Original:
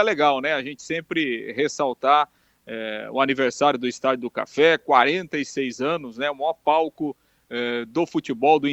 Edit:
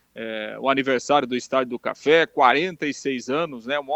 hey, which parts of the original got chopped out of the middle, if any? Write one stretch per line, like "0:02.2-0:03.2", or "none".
none

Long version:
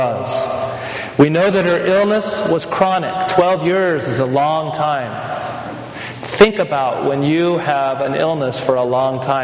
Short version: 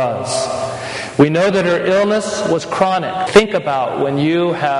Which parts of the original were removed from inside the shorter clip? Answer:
0:03.3-0:06.3

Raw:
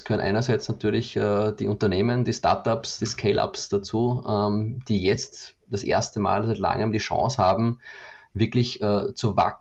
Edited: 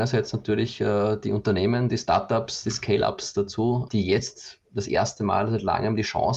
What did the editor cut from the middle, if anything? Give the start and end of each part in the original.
0:04.2-0:04.8

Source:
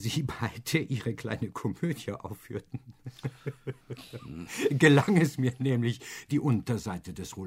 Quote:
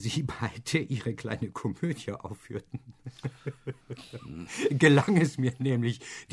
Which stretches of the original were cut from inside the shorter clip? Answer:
none

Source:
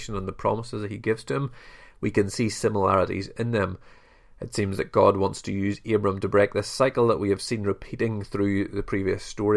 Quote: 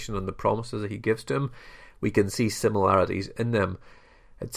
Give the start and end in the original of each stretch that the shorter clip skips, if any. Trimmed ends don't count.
none

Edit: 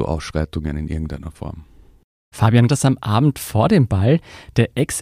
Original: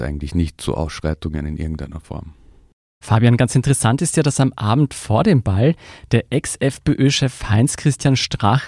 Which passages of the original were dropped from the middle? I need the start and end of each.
0:03.4-0:04.2

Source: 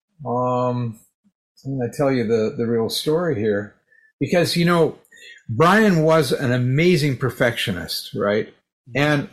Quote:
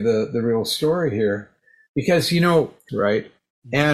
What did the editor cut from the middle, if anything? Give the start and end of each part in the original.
0:05.1-0:08.1

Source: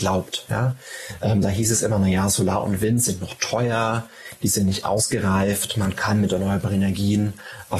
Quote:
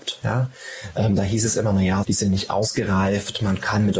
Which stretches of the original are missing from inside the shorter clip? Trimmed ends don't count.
0:02.3-0:04.4

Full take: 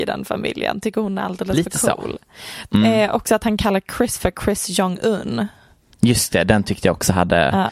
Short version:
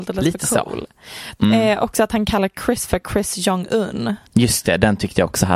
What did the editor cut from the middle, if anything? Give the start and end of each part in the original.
0:05.6-0:05.9

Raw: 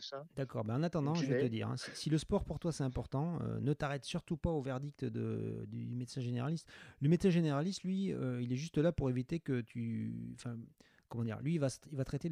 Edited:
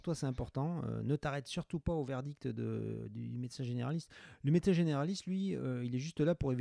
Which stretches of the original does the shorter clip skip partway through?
none

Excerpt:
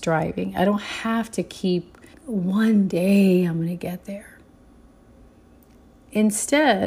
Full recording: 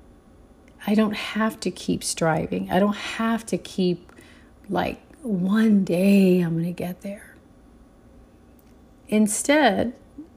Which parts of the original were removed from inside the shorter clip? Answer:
0:04.3-0:05.1

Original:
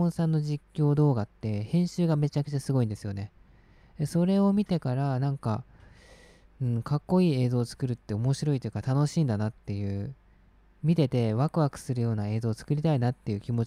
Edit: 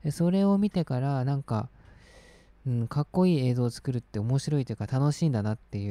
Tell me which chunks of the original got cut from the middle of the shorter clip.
none

